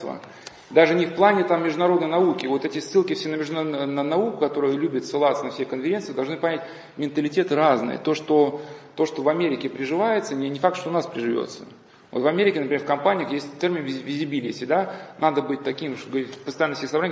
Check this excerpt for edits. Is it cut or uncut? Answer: uncut